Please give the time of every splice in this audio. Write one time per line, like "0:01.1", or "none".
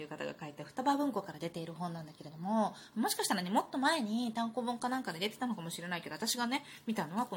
none